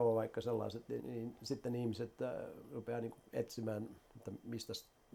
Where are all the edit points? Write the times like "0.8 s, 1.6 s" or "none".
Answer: 1.0 s